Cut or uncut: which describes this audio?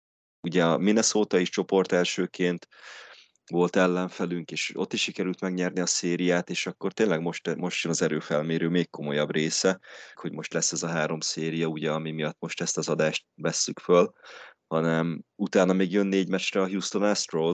cut